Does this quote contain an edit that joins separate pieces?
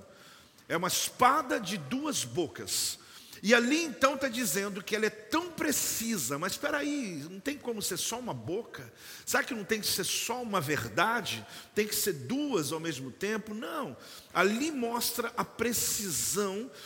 no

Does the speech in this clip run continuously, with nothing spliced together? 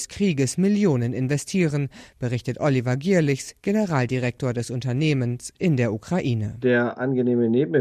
yes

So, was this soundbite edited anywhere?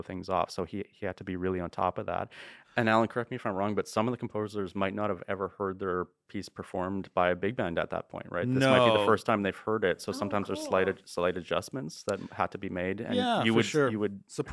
yes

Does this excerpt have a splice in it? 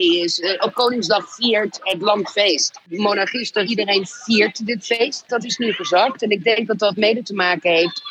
yes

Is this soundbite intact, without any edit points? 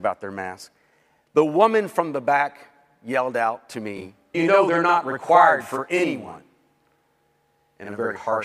no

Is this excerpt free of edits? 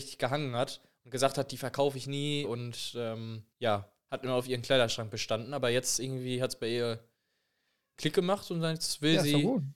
no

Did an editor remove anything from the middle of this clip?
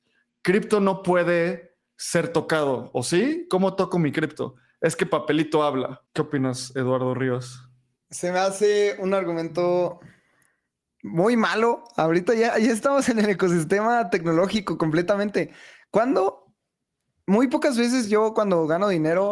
no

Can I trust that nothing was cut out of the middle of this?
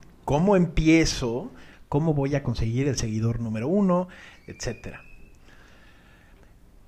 no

